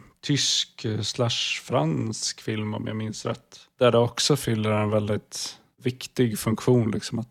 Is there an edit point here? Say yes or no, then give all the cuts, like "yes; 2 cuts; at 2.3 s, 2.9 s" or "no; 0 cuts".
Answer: no; 0 cuts